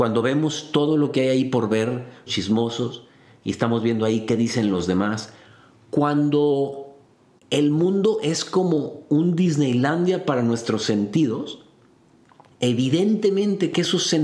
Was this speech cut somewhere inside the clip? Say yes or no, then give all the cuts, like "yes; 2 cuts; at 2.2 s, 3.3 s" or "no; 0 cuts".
yes; 2 cuts; at 2.3 s, 12.5 s